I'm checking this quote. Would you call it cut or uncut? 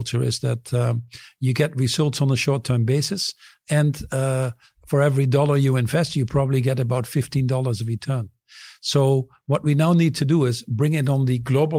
uncut